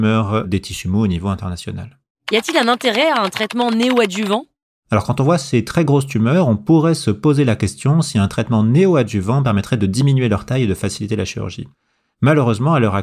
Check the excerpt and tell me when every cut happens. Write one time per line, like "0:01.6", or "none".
none

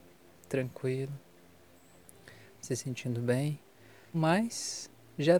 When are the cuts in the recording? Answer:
0:02.5
0:04.1

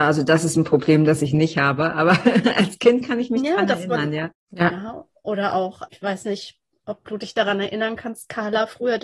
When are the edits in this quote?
0:04.3
0:05.9

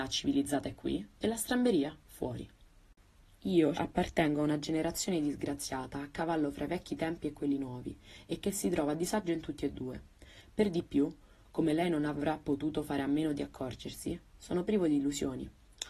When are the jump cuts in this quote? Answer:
0:03.7

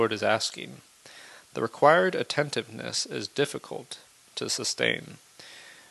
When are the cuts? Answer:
none

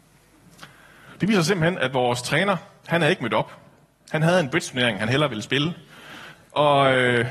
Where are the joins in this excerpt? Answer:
none

